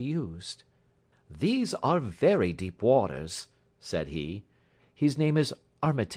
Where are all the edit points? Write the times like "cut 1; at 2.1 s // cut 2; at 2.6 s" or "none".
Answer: cut 1; at 1.1 s // cut 2; at 4.8 s